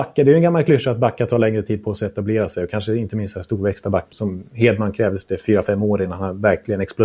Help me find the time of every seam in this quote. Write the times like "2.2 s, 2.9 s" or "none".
4.1 s